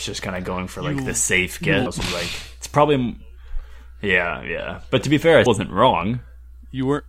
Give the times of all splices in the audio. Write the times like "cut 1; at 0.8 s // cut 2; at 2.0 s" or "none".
cut 1; at 1.9 s // cut 2; at 5.5 s

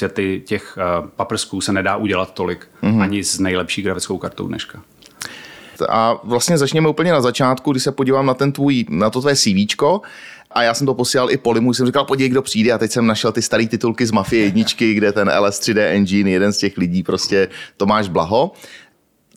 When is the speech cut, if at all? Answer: cut 1; at 5.8 s

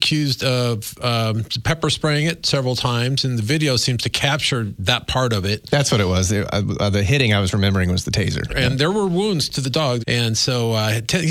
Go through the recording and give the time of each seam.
cut 1; at 8.5 s // cut 2; at 10.0 s

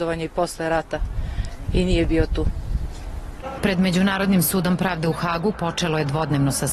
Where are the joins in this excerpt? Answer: cut 1; at 3.6 s // cut 2; at 5.5 s

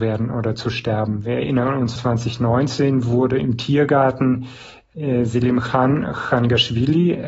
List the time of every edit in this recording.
cut 1; at 2.0 s

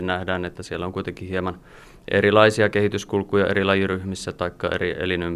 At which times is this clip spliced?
none

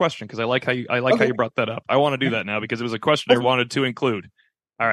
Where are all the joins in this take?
cut 1; at 3.4 s

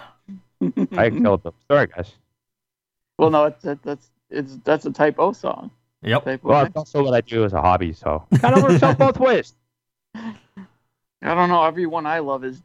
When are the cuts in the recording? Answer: cut 1; at 6.6 s // cut 2; at 11.0 s

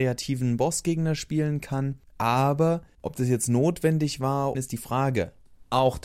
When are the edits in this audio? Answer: cut 1; at 4.5 s

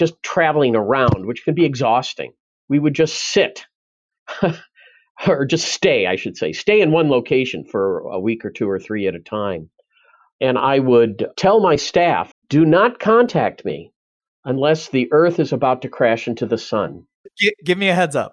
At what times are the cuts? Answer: cut 1; at 12.3 s // cut 2; at 17.3 s

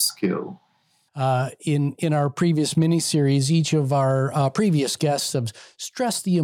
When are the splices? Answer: cut 1; at 1.1 s

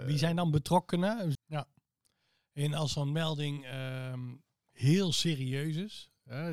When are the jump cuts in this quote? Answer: cut 1; at 1.3 s

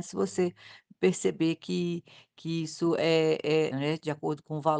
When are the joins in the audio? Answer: cut 1; at 3.7 s

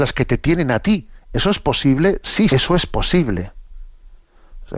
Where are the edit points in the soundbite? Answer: cut 1; at 2.5 s

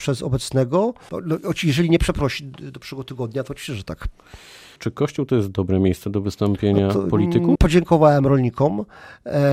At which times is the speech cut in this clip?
cut 1; at 1.1 s // cut 2; at 4.8 s // cut 3; at 7.5 s

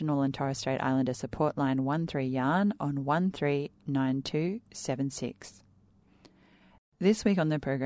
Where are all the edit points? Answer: cut 1; at 6.8 s

